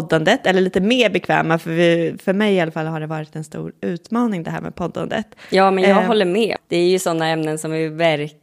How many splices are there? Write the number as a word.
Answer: one